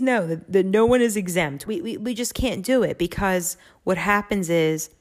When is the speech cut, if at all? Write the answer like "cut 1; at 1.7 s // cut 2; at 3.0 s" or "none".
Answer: cut 1; at 1.6 s